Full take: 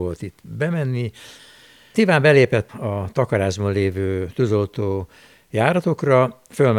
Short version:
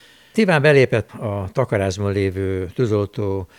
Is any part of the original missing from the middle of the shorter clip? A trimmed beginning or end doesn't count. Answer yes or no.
no